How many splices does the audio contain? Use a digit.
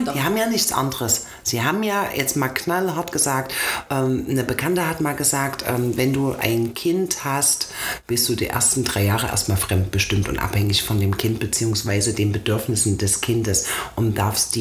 0